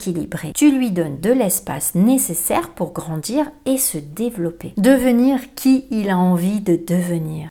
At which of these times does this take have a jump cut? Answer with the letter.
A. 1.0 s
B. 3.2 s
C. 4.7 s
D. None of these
D